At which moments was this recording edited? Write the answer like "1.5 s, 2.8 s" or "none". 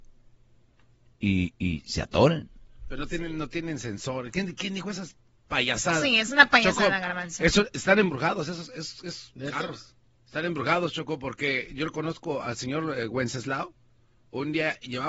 none